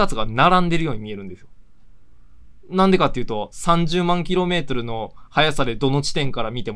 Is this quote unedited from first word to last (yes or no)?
yes